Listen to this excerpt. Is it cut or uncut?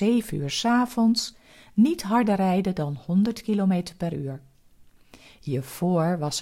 uncut